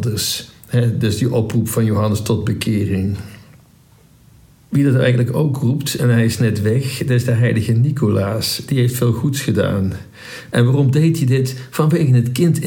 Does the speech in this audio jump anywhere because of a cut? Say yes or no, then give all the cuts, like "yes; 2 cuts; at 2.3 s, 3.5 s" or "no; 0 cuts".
no; 0 cuts